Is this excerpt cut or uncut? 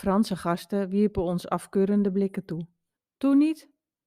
cut